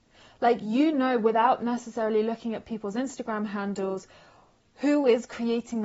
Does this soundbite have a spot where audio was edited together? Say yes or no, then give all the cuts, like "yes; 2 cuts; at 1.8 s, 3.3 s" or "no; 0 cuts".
no; 0 cuts